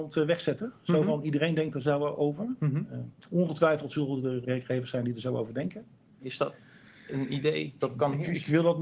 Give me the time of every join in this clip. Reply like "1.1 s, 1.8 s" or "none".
4.4 s, 6.2 s, 7.8 s